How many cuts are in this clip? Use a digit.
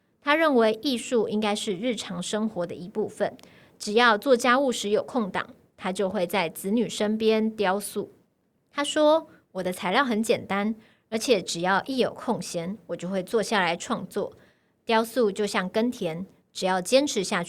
0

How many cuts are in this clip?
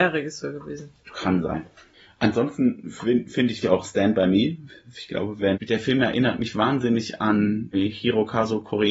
3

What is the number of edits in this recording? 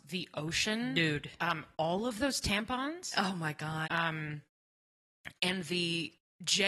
1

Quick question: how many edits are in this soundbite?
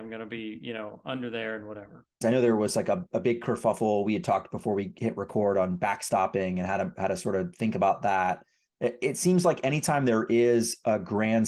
1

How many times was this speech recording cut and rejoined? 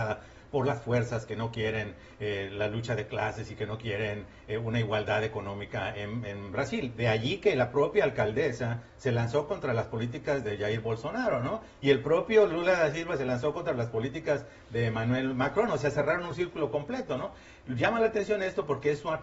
0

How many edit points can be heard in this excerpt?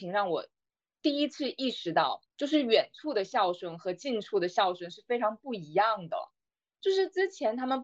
1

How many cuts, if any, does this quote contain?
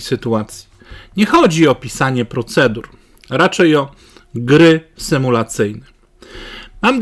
0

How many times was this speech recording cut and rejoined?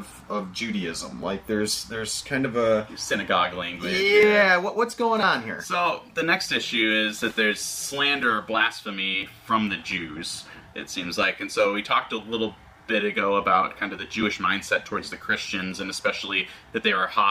0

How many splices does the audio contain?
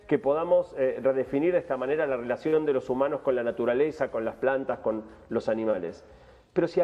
0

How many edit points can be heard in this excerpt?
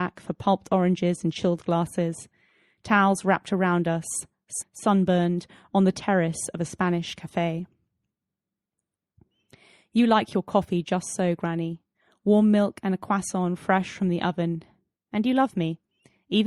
1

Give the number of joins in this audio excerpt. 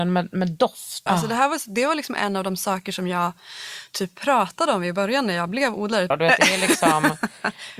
2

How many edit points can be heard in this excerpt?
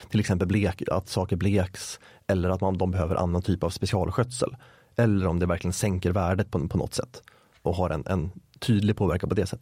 0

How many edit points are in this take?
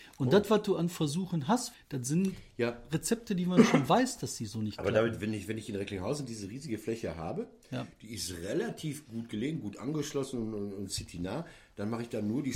1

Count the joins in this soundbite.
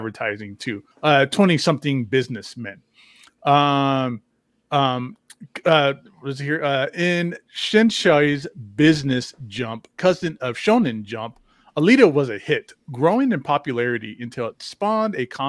1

